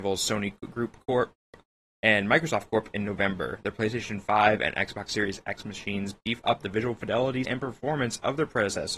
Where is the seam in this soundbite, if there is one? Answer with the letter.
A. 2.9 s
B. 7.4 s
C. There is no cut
B